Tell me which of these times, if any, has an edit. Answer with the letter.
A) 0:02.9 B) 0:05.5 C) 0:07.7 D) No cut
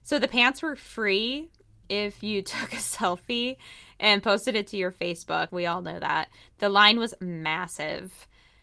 B